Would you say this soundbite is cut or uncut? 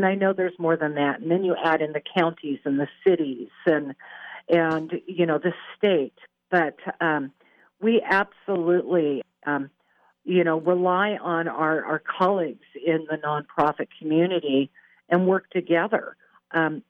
uncut